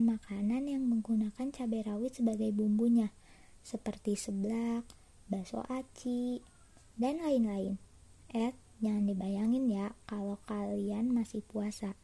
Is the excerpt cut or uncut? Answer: uncut